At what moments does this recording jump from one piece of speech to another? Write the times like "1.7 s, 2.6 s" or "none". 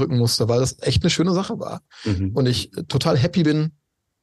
none